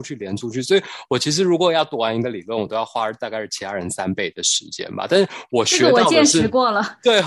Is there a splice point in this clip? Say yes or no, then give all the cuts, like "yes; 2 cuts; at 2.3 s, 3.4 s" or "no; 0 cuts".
no; 0 cuts